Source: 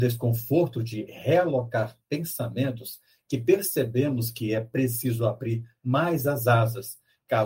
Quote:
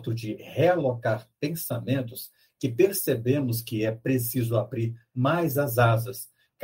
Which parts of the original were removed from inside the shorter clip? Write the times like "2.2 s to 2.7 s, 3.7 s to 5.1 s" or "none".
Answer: none